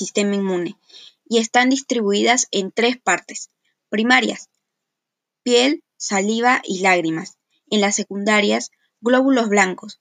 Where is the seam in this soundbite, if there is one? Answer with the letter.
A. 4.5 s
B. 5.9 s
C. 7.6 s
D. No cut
B